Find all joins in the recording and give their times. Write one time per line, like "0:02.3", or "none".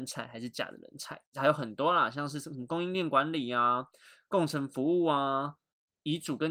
0:01.3

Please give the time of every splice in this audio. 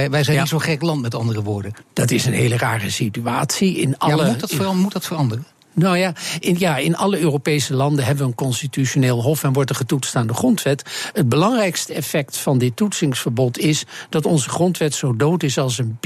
0:01.8

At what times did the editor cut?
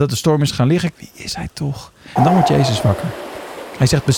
0:00.9
0:02.2

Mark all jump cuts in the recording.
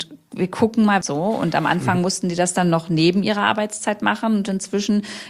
0:01.0

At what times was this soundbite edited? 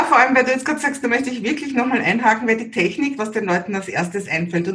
0:01.0
0:03.2

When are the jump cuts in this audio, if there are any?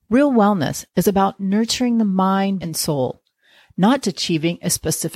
0:02.6
0:04.0

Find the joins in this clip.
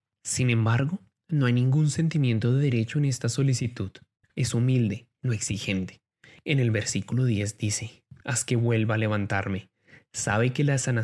0:08.2

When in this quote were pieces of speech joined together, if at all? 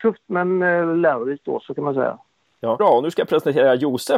0:02.8

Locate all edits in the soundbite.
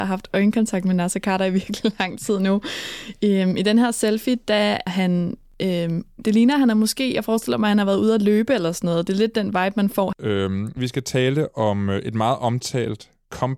0:04.9
0:10.1

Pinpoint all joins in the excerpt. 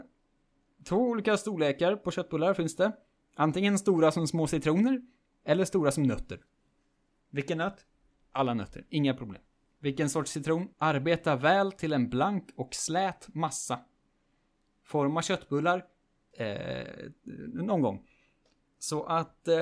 0:10.7
0:16.3

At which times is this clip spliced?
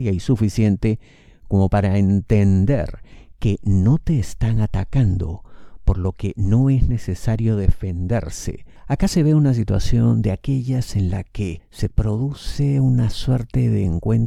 0:08.8

